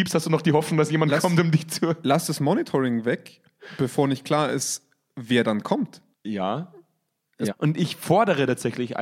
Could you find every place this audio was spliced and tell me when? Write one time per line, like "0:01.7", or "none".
0:06.1
0:07.5